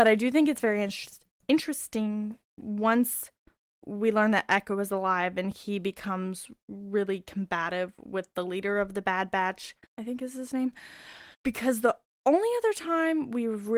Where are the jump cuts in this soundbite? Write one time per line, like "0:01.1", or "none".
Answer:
0:09.8
0:11.3